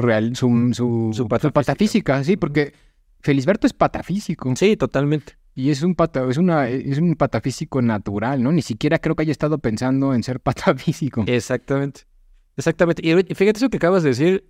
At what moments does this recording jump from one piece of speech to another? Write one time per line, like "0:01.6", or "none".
none